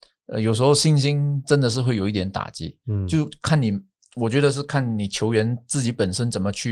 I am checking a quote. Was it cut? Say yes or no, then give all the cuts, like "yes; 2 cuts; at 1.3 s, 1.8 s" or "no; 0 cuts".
no; 0 cuts